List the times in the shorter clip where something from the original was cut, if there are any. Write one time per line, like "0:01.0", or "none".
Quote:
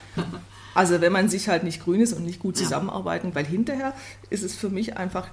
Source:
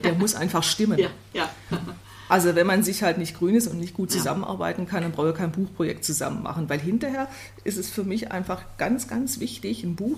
0:03.3